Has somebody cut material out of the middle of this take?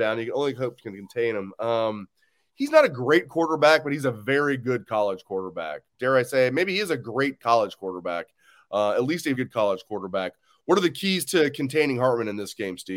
yes; 1 cut; at 9.3 s

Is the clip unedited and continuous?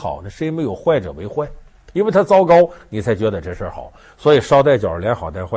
yes; 0 cuts

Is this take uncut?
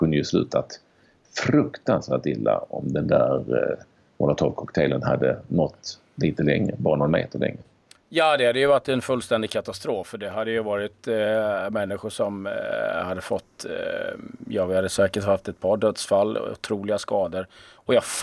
yes; 0 cuts

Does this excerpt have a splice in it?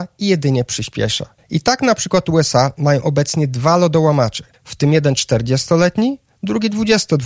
no; 0 cuts

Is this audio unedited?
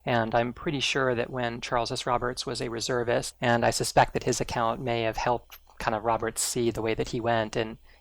no; 1 cut; at 3.3 s

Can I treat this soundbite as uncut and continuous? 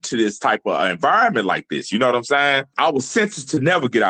no; 1 cut; at 2.7 s

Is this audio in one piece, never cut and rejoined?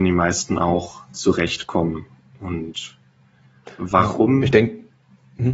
yes; 0 cuts

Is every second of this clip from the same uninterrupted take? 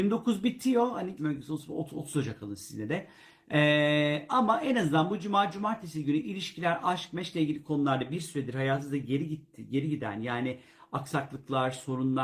no; 1 cut; at 1.2 s

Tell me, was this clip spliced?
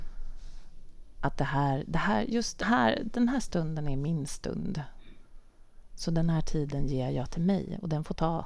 yes; 1 cut; at 2.6 s

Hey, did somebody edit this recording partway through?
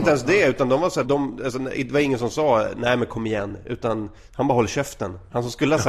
yes; 1 cut; at 1.0 s

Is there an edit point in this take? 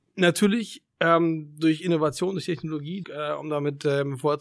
yes; 1 cut; at 3.0 s

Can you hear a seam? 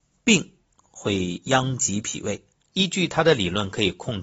yes; 1 cut; at 2.6 s

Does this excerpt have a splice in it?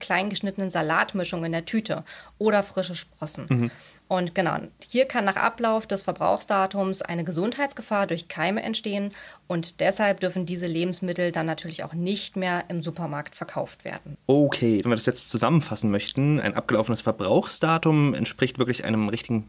yes; 2 cuts; at 14.8 s, 16.4 s

